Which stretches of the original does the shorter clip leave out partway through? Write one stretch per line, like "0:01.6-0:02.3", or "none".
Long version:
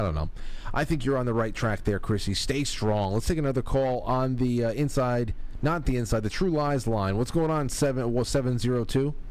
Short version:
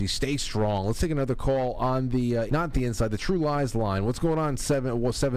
0:04.7-0:05.6